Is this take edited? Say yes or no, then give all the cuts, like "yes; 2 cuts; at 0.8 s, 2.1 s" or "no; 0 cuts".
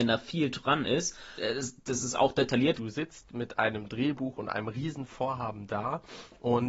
yes; 2 cuts; at 1.4 s, 2.7 s